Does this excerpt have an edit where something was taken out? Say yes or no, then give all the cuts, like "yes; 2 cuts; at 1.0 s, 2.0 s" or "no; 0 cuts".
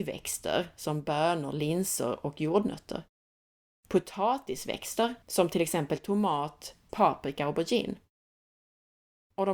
yes; 2 cuts; at 5.2 s, 6.9 s